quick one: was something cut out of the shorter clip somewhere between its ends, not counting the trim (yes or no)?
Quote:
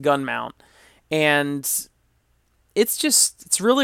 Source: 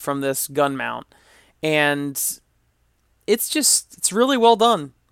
no